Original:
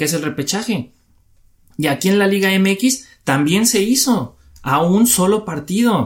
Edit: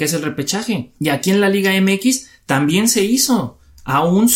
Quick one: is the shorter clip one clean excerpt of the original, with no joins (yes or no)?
no